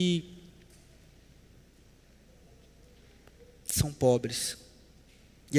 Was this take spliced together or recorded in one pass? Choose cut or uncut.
uncut